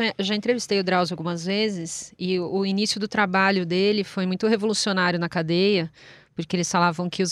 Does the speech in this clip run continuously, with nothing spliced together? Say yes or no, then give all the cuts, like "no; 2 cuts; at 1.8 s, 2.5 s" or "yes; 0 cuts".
yes; 0 cuts